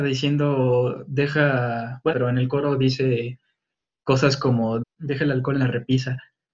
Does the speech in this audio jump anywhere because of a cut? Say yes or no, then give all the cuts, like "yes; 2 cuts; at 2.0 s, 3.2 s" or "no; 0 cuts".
yes; 2 cuts; at 2.1 s, 4.8 s